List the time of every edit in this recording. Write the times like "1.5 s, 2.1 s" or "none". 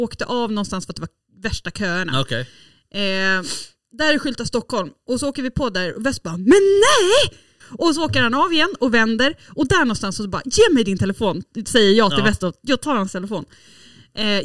7.6 s